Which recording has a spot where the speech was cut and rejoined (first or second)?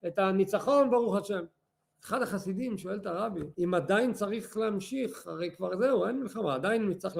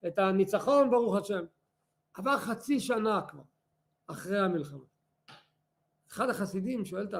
first